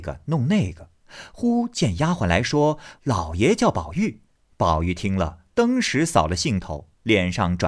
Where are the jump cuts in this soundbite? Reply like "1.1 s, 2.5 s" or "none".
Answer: 4.3 s, 5.5 s

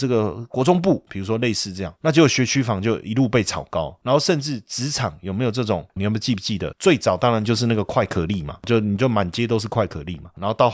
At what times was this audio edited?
6.0 s

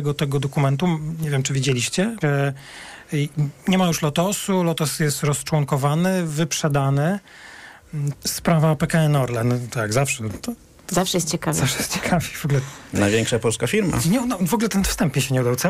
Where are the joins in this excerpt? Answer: 2.2 s, 8.1 s

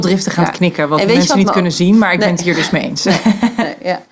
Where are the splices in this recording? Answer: none

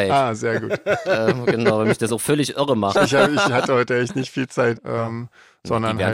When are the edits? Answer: 2.9 s, 4.8 s

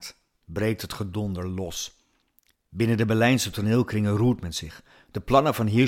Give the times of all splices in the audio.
none

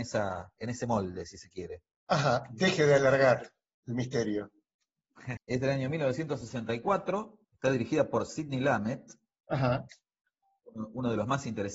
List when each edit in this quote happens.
5.4 s, 7.4 s

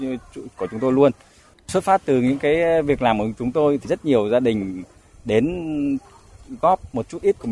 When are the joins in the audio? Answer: 1.5 s

